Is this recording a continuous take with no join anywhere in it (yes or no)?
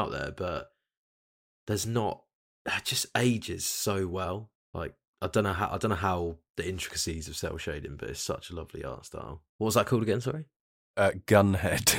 no